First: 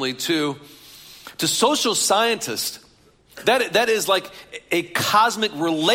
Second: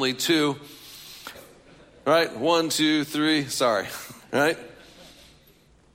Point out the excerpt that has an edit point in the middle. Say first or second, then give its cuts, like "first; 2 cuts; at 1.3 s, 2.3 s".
second; 2 cuts; at 1.3 s, 4.2 s